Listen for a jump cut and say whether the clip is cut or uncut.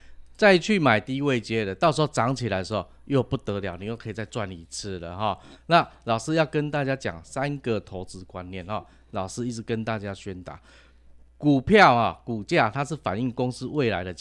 uncut